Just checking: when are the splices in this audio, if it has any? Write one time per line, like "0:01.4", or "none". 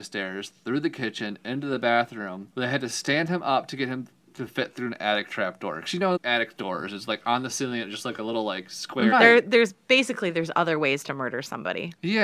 0:06.2
0:09.1